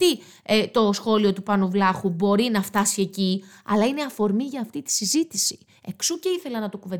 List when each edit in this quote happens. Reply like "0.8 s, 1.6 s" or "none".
none